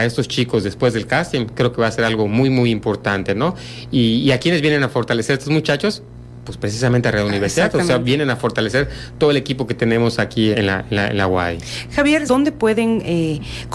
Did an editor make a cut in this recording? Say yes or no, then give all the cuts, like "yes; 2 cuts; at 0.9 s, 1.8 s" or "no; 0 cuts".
yes; 2 cuts; at 10.5 s, 12.3 s